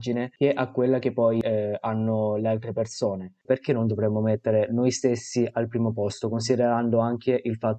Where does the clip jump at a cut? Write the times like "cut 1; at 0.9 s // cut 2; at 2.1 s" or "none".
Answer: cut 1; at 3.4 s